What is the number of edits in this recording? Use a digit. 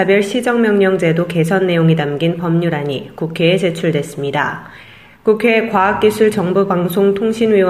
0